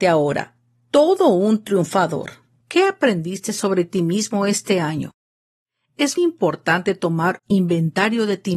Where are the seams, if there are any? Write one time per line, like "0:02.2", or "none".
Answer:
0:02.6
0:06.2